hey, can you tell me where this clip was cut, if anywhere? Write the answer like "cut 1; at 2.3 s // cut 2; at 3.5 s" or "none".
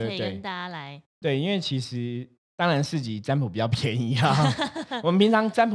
cut 1; at 1.2 s